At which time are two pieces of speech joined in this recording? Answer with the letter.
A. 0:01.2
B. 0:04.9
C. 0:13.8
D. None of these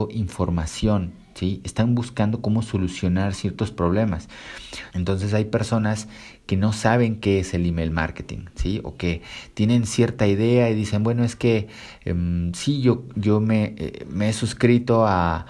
B